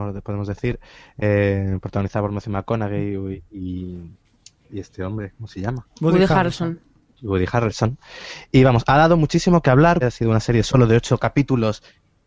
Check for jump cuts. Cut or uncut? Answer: cut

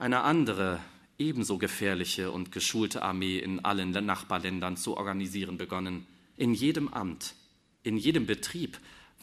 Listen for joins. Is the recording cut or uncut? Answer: cut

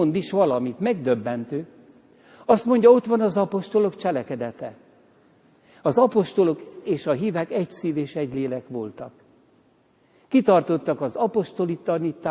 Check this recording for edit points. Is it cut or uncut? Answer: uncut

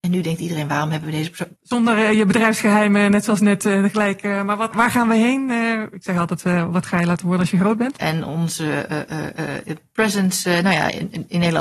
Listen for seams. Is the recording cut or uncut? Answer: cut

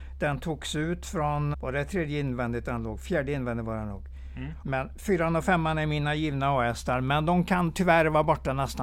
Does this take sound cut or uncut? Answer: cut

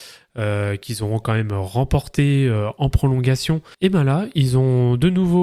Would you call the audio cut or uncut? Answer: cut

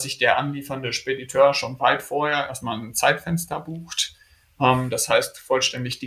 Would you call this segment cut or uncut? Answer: uncut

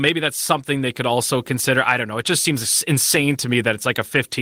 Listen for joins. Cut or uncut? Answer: uncut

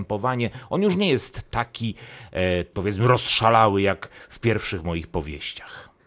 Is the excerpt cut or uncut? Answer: cut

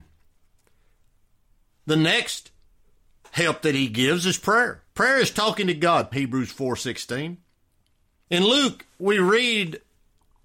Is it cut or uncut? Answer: cut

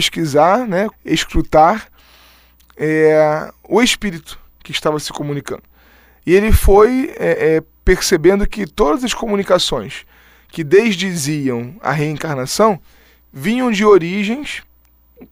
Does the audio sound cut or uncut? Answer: cut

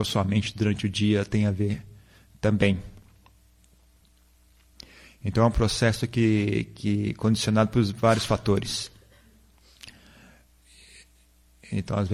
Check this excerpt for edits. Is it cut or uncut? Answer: uncut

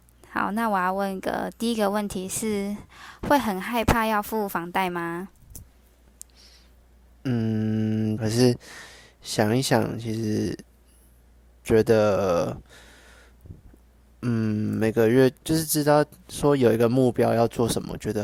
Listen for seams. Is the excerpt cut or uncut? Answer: cut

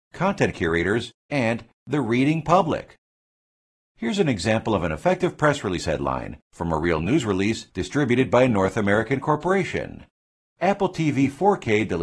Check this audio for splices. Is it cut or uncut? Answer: cut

